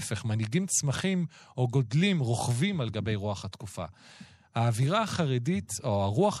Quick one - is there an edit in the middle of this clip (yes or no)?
no